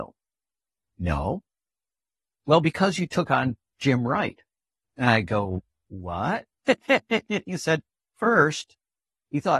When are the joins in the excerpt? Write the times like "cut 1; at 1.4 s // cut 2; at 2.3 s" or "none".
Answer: cut 1; at 4.8 s // cut 2; at 8.0 s